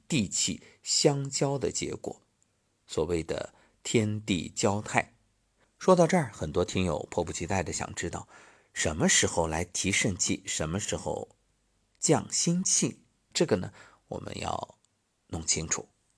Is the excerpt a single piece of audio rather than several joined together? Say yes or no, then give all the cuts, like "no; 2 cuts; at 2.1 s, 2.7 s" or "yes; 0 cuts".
no; 2 cuts; at 5.6 s, 13.3 s